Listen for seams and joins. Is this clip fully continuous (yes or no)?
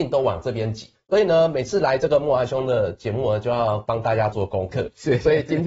no